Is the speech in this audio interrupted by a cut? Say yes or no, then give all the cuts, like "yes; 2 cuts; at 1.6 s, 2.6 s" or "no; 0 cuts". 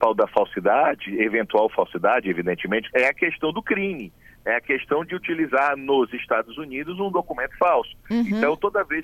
yes; 1 cut; at 2.9 s